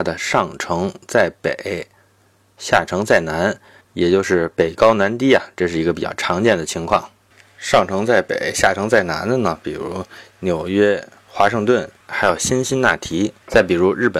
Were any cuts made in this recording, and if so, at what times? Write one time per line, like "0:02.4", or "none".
none